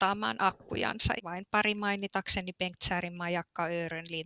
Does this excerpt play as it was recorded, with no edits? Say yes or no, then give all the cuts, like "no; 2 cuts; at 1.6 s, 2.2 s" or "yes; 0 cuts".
no; 1 cut; at 1.2 s